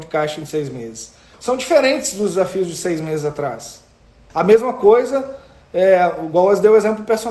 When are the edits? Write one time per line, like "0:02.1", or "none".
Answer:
0:01.3
0:04.3